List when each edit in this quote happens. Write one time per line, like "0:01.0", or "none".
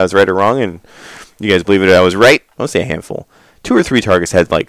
0:02.6